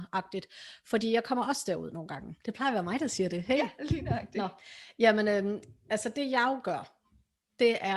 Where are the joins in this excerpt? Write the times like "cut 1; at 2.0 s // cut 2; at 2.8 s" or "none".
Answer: cut 1; at 2.4 s